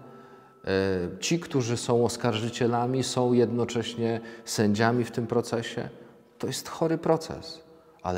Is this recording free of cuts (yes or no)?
yes